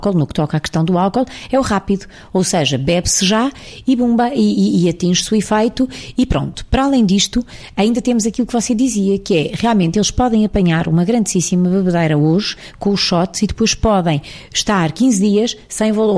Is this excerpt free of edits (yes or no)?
yes